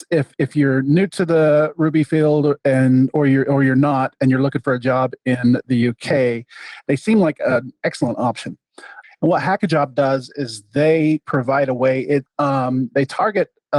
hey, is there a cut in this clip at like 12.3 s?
yes; 2 cuts; at 9.0 s, 12.3 s

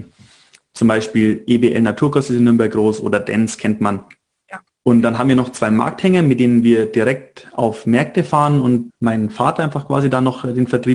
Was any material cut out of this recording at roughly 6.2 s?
no; 2 cuts; at 4.7 s, 8.9 s

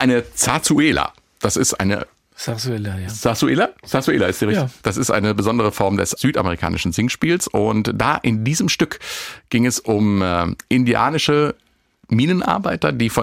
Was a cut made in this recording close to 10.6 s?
no; 1 cut; at 4.8 s

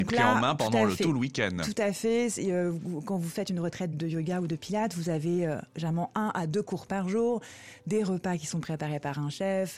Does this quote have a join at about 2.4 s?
no; 1 cut; at 3.9 s

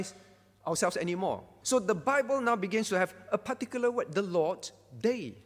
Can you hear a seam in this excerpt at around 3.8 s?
no; 1 cut; at 1.6 s

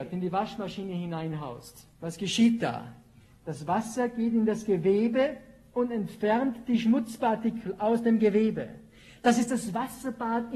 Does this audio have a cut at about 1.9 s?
yes; 1 cut; at 1.9 s

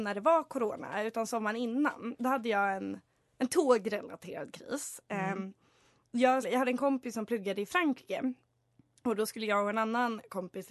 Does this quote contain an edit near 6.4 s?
yes; 1 cut; at 6.4 s

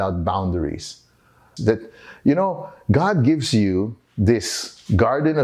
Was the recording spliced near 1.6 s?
yes; 1 cut; at 1.6 s

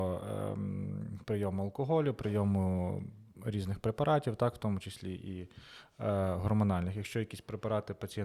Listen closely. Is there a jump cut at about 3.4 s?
no; 0 cuts

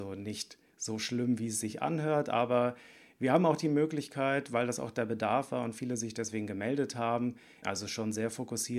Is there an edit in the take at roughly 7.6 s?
yes; 1 cut; at 7.6 s

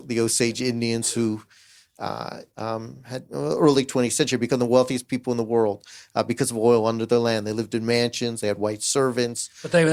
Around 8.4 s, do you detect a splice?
no; 1 cut; at 2.5 s

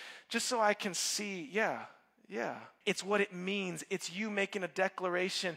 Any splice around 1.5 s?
no; 1 cut; at 2.8 s

